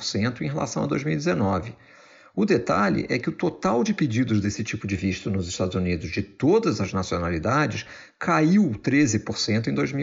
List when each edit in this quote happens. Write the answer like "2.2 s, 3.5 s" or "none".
none